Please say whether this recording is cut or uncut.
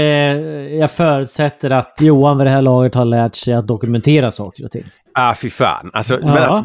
cut